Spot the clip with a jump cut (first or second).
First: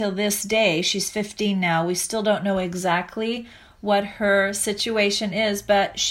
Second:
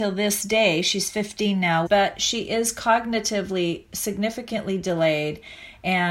second